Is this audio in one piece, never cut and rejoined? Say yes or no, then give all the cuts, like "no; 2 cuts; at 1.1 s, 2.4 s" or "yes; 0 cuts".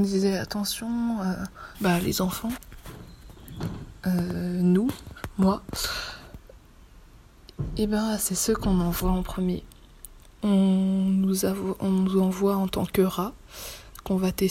no; 2 cuts; at 1.7 s, 10.4 s